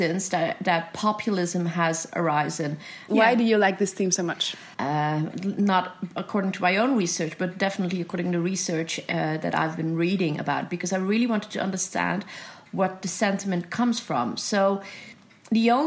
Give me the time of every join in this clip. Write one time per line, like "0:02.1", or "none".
0:03.1
0:04.7